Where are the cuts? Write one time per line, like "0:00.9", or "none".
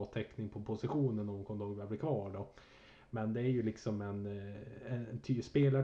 none